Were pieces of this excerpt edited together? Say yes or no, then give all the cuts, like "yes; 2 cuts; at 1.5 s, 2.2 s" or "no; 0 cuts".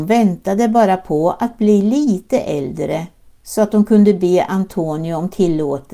no; 0 cuts